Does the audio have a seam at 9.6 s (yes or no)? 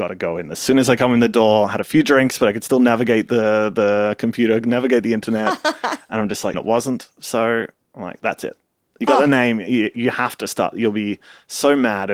no